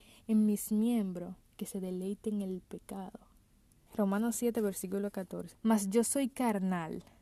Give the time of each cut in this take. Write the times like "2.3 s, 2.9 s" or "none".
3.9 s, 5.5 s